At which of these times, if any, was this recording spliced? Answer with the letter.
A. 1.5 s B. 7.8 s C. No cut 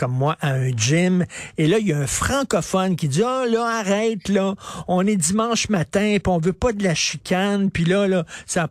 A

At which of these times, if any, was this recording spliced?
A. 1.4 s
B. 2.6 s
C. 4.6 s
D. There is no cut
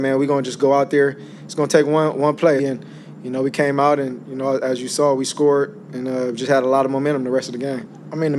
B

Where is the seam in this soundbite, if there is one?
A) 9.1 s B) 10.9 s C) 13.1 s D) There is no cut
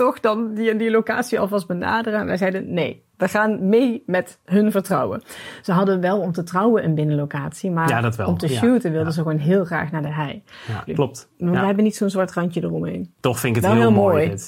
B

